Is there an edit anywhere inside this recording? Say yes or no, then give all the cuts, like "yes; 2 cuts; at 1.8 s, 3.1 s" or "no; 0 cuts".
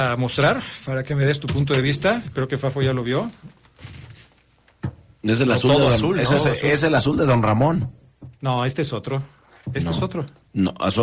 no; 0 cuts